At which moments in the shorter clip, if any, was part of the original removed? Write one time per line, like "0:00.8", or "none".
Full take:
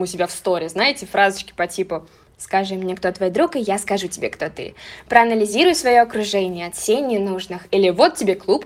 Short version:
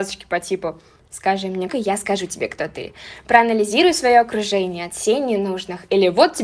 0:01.7

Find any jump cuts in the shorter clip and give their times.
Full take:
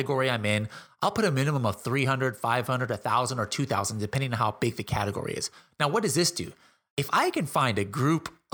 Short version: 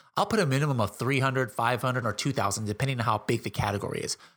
0:02.0

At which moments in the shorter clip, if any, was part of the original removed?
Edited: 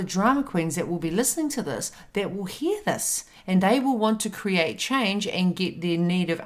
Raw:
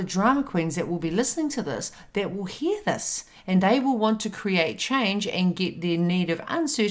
none

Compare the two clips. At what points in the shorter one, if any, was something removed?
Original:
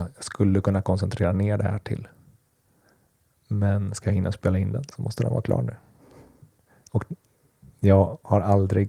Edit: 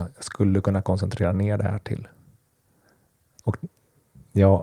0:03.3

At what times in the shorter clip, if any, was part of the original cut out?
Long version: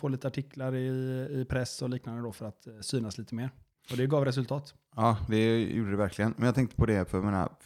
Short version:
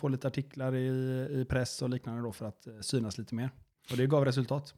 none

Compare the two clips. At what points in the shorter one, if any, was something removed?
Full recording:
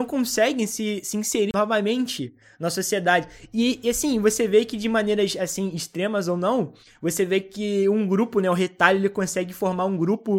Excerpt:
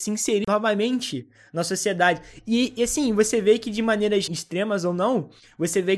0:04.3

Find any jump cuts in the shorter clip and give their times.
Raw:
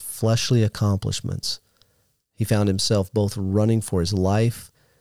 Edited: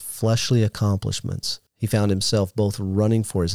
0:01.7

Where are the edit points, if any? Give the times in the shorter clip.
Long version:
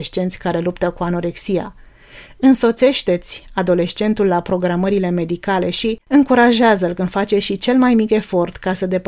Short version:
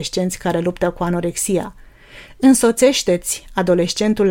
none

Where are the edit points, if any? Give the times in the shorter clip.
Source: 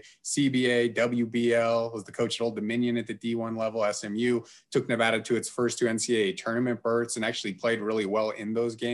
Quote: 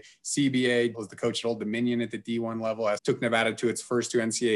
0:00.9
0:03.0

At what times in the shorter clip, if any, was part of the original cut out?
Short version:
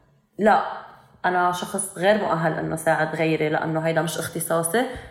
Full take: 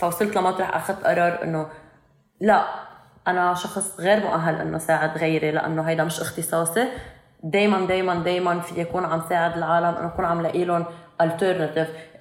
none

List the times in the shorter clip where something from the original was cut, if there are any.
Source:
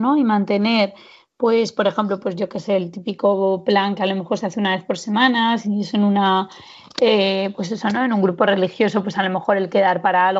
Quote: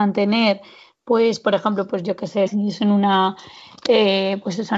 0:02.5

